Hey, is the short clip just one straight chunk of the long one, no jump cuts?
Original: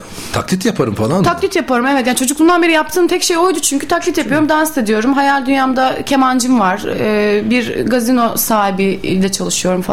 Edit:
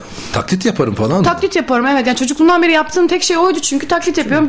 yes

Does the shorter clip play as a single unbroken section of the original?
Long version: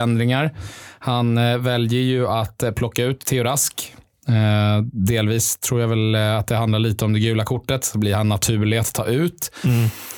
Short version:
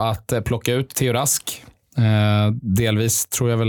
yes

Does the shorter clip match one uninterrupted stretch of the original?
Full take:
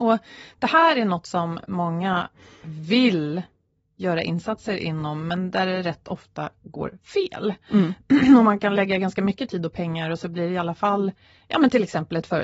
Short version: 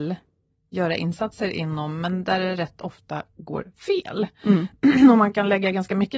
yes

